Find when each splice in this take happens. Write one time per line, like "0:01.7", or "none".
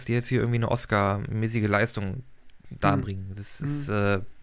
none